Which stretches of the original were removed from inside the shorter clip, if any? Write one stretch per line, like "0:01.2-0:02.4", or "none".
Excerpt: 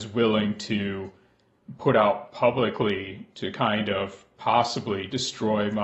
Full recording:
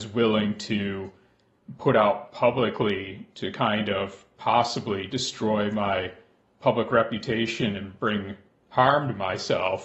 none

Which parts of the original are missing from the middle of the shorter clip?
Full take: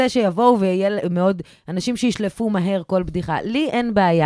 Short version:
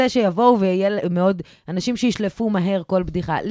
none

